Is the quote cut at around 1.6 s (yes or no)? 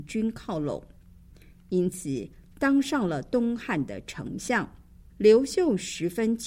no